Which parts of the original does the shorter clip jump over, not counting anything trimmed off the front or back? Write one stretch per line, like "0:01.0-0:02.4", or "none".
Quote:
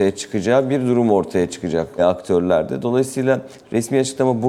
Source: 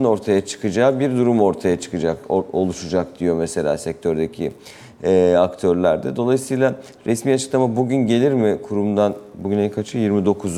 0:02.3-0:05.3